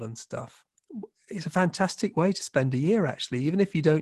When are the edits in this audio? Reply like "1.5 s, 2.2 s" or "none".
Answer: none